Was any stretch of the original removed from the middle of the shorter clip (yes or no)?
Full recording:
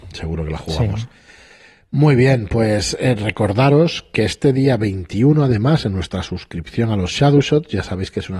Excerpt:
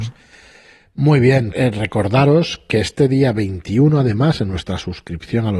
yes